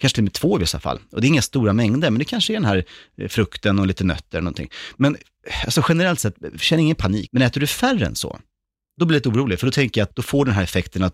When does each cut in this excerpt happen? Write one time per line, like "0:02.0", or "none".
0:07.3
0:10.1